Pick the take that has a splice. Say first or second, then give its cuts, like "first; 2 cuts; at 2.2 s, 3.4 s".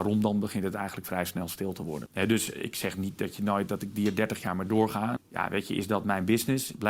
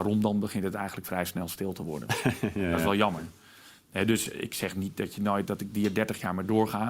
first; 2 cuts; at 2.1 s, 5.2 s